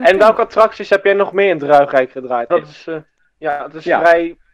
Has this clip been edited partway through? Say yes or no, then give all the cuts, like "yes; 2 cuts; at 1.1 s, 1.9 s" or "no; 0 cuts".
yes; 1 cut; at 2.5 s